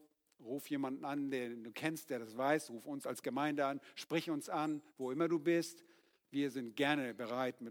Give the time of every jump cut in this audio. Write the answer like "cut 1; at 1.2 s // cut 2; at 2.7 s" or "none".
none